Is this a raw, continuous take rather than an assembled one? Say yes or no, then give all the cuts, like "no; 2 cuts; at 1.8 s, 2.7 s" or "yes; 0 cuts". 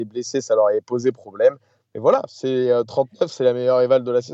yes; 0 cuts